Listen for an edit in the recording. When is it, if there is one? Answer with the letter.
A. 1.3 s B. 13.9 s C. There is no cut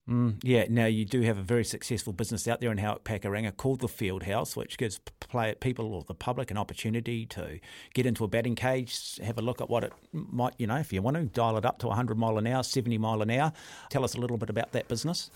B